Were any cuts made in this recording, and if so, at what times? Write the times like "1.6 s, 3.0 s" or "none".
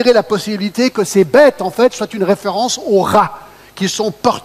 none